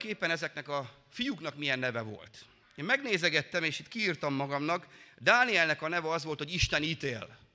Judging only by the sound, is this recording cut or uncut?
uncut